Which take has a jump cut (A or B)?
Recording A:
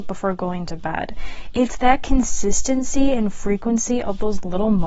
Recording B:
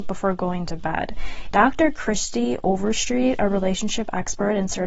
B